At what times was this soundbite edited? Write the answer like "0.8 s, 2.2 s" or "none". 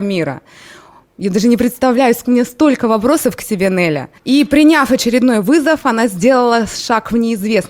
4.2 s